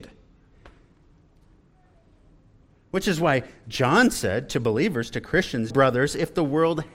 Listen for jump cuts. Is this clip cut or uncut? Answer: cut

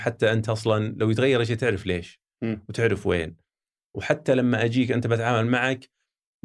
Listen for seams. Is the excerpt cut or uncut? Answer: uncut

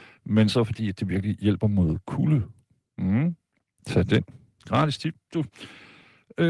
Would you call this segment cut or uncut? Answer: uncut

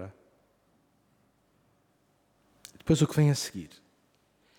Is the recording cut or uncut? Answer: uncut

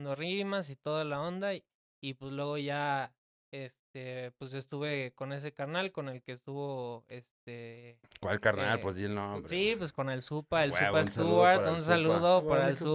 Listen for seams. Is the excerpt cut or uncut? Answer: uncut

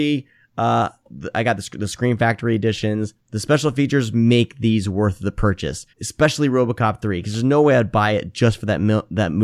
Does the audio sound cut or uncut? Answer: cut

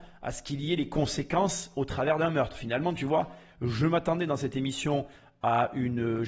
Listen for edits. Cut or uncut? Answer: uncut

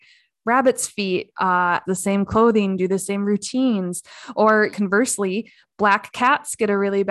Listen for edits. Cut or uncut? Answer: cut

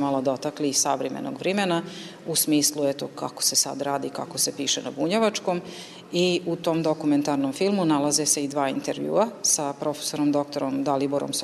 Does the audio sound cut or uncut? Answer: uncut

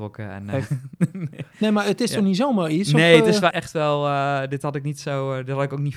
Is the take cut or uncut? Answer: cut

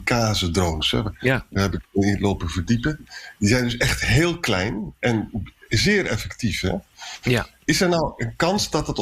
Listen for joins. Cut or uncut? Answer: uncut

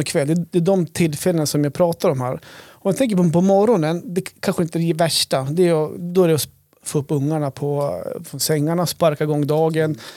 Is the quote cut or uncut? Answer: uncut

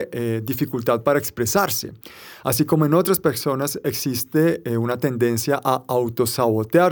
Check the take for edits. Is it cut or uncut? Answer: uncut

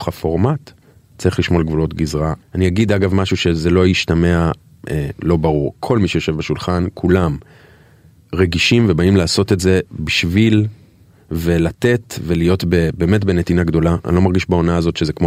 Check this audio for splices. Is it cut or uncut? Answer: uncut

